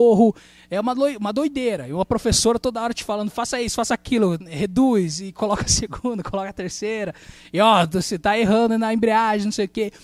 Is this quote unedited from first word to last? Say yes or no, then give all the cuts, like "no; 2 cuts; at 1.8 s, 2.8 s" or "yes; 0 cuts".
yes; 0 cuts